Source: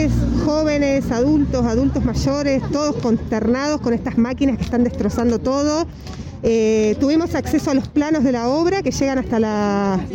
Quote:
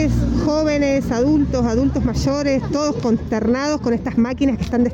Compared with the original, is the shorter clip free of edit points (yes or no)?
yes